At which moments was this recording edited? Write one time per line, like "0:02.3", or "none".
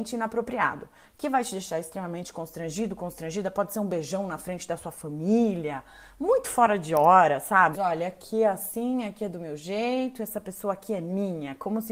0:07.7